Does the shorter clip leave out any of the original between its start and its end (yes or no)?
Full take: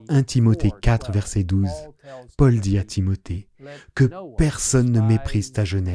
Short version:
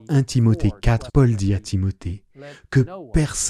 yes